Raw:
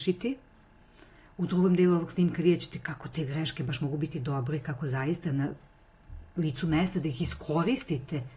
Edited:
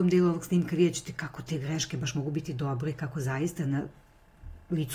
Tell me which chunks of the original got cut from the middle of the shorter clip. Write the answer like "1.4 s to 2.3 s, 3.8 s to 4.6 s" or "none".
none

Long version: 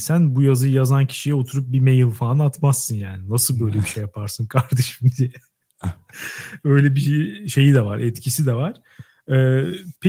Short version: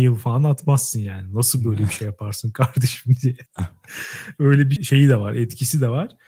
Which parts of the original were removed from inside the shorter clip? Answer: 5.4 s to 5.7 s, 7.0 s to 7.4 s

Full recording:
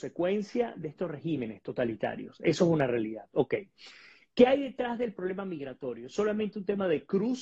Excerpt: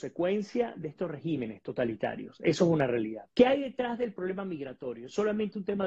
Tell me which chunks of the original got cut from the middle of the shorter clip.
3.3 s to 4.3 s

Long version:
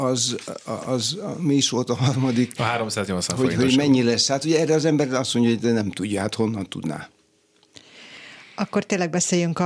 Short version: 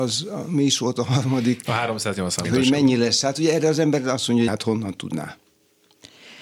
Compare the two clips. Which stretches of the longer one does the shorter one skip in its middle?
3.4 s to 3.5 s, 5.5 s to 6.2 s

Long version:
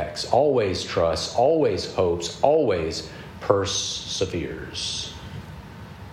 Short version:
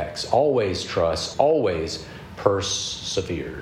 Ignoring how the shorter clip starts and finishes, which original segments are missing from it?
1.3 s to 2.4 s

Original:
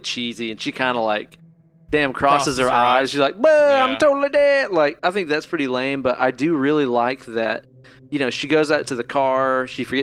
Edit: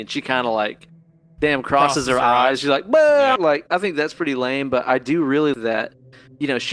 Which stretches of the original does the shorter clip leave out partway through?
3.9 s to 4.7 s, 6.9 s to 7.3 s

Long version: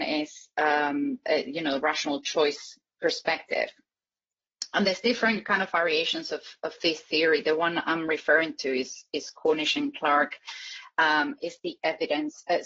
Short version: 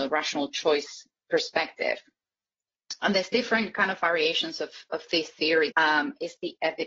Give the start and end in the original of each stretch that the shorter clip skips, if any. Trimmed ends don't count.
7.4 s to 10.9 s

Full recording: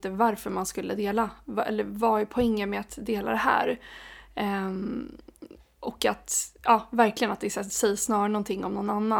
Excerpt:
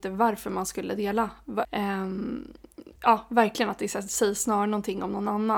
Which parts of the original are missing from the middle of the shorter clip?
1.6 s to 4.3 s, 5.6 s to 6.6 s

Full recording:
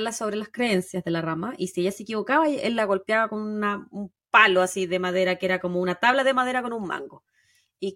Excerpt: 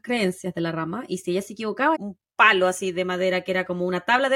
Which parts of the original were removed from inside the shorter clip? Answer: 2.4 s to 3.9 s

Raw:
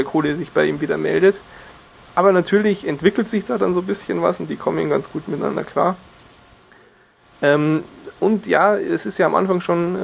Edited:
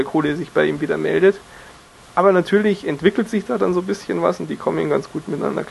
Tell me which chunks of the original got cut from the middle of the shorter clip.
none

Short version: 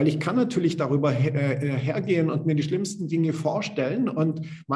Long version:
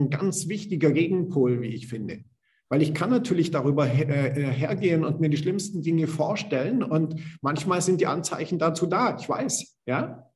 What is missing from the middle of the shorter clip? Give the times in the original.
none

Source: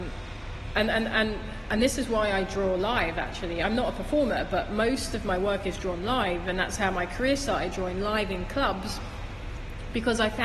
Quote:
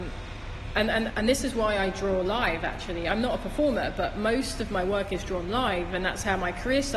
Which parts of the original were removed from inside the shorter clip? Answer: 1.1 s to 1.6 s

